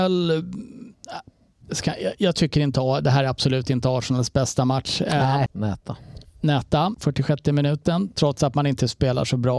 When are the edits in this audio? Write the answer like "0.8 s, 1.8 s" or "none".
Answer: 5.5 s, 6.9 s, 8.1 s